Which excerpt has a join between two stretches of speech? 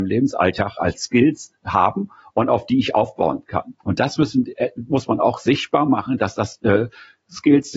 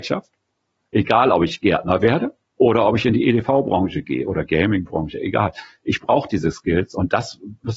first; 1 cut; at 3.8 s

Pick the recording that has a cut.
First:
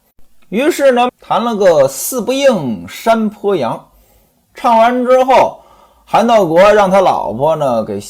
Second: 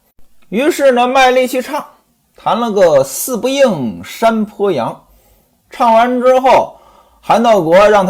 first; 1 cut; at 1.1 s

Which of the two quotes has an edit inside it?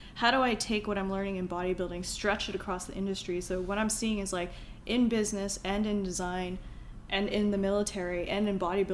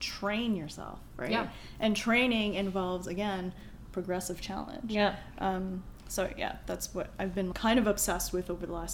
second; 1 cut; at 7.5 s

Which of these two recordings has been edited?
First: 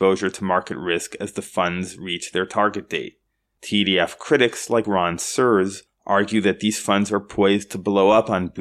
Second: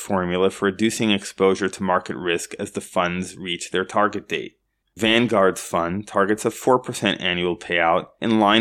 second; 1 cut; at 4.8 s

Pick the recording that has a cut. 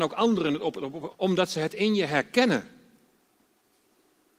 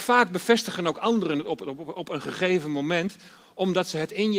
first; 1 cut; at 1.1 s

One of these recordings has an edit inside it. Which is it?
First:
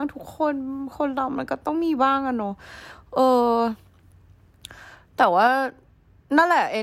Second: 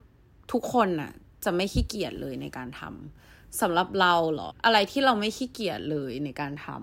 second; 1 cut; at 4.5 s

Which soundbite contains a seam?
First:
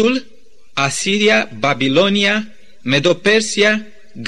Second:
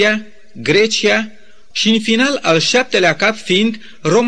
second; 1 cut; at 1.7 s

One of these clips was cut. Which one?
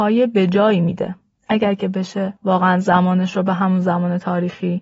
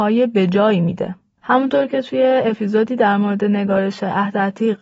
second; 1 cut; at 1.4 s

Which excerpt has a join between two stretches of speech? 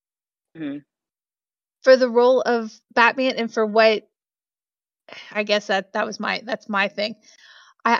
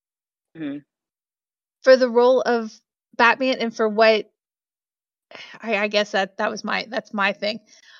first; 2 cuts; at 2.8 s, 5.3 s

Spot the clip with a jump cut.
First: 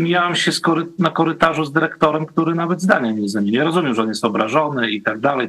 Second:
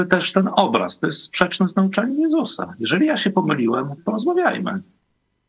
second; 1 cut; at 4.0 s

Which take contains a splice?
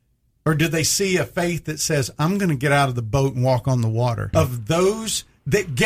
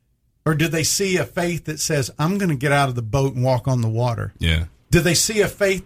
first; 1 cut; at 4.3 s

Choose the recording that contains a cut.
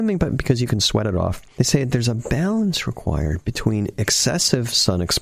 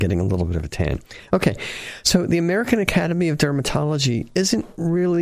first; 1 cut; at 1.6 s

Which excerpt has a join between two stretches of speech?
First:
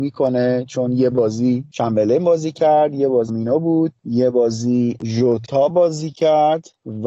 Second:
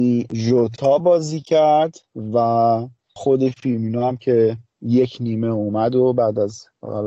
first; 1 cut; at 3.3 s

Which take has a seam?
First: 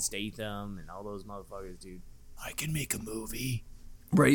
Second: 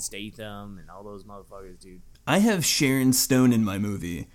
second; 1 cut; at 2.1 s

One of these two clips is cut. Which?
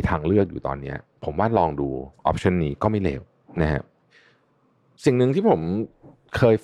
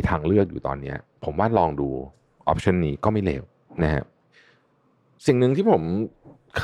first; 1 cut; at 2.2 s

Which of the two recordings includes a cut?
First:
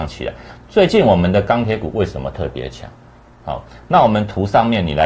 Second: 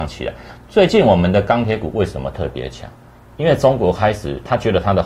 first; 1 cut; at 3.2 s

